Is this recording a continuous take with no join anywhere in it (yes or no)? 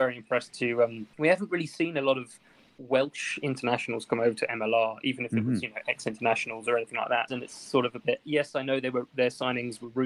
no